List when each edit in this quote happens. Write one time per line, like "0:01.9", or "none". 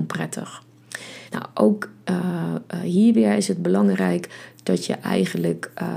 0:01.3